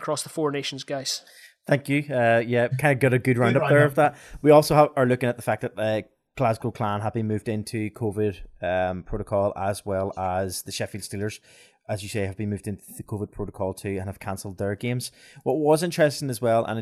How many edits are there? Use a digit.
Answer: 1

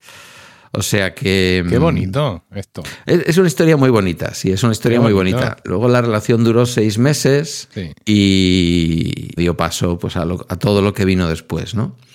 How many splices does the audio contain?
2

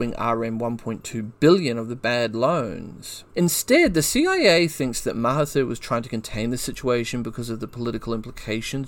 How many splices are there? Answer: 1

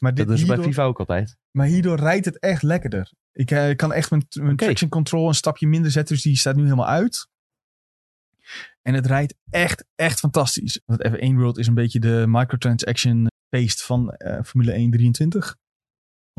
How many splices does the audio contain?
2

